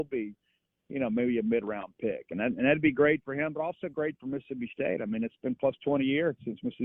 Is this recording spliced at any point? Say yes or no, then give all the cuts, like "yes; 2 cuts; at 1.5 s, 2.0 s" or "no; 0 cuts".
no; 0 cuts